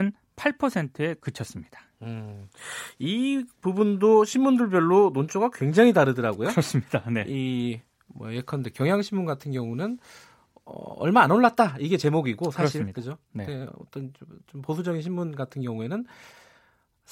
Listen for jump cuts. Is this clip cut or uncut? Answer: uncut